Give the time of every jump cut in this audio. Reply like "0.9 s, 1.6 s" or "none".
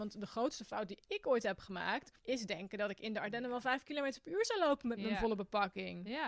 2.2 s